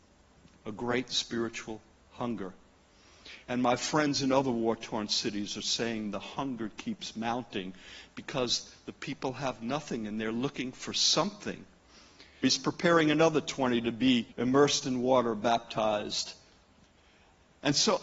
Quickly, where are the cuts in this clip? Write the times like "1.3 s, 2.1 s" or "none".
12.4 s, 14.3 s